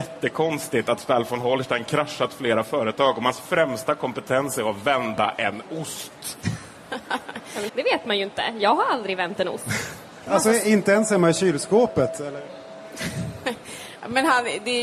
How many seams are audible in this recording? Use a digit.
2